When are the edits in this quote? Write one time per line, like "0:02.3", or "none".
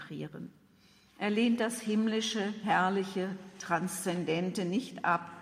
none